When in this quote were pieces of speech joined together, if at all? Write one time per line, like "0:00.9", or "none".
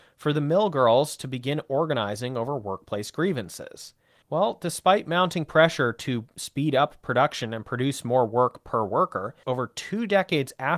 0:04.2
0:09.4